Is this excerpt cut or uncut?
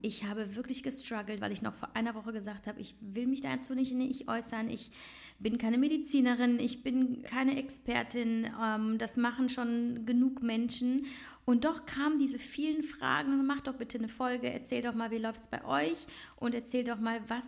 cut